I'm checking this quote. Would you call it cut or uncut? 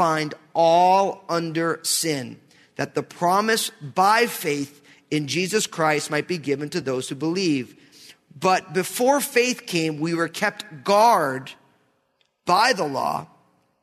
uncut